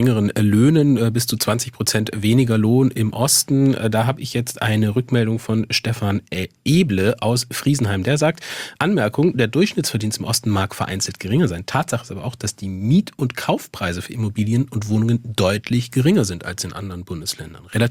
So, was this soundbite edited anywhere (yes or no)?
no